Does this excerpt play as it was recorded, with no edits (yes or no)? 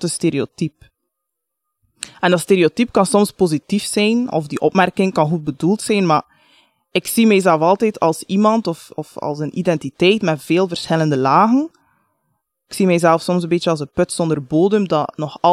yes